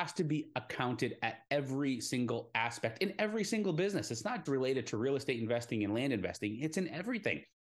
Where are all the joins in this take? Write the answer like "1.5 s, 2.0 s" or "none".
4.5 s